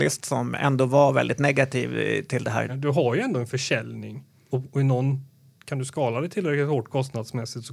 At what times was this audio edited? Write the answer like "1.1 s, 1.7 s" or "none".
2.7 s, 4.5 s

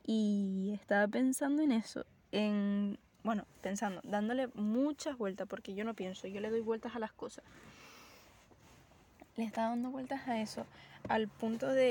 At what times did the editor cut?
none

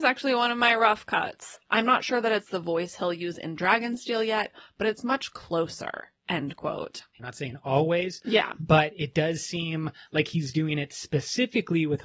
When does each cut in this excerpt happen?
1.7 s, 7.2 s

